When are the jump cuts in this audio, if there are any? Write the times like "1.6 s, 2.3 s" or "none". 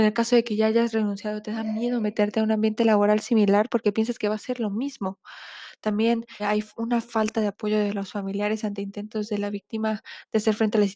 6.4 s

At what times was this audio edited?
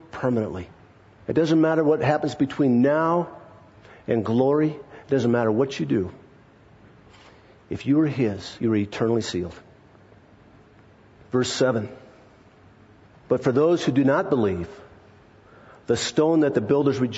8.6 s, 13.3 s

